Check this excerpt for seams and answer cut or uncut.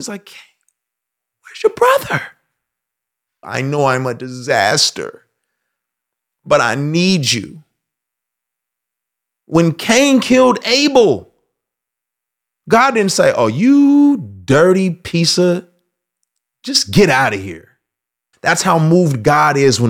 cut